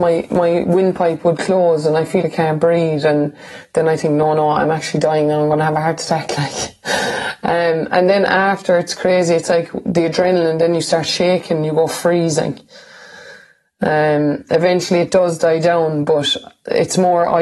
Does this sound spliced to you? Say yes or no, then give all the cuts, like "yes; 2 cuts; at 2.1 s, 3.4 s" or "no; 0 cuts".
yes; 1 cut; at 2.2 s